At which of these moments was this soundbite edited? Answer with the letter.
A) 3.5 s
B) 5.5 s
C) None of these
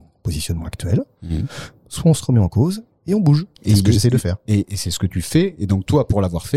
A